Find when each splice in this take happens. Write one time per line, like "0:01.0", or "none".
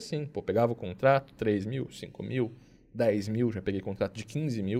none